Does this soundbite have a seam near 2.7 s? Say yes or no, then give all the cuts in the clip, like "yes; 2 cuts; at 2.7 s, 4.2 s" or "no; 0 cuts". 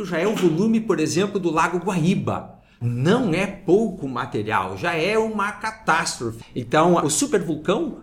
no; 1 cut; at 6.4 s